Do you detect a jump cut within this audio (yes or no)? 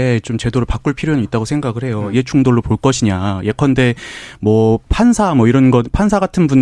yes